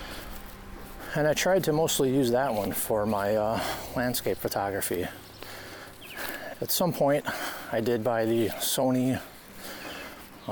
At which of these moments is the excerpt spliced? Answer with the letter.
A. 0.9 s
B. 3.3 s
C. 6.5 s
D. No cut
C